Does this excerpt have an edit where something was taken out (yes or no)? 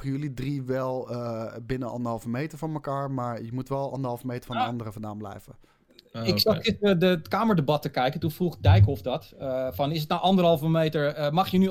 no